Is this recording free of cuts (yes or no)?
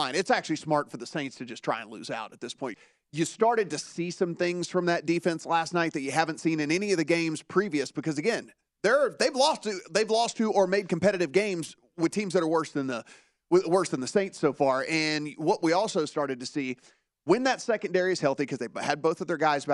no